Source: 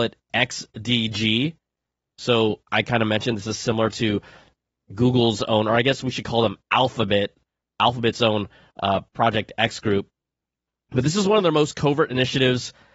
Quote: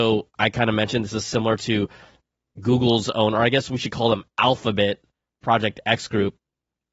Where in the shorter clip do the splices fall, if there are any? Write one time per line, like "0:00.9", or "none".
0:05.4